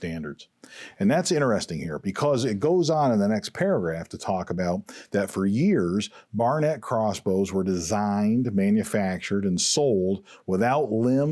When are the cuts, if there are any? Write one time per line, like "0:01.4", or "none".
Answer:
none